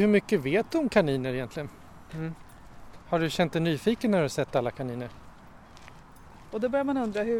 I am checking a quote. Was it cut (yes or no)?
yes